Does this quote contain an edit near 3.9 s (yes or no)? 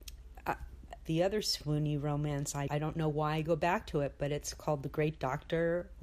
no